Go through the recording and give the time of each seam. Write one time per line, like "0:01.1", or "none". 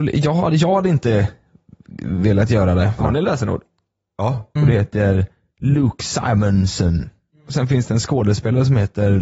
0:03.0
0:04.6